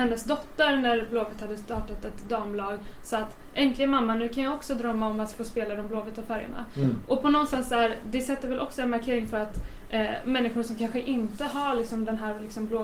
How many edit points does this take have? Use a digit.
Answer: 0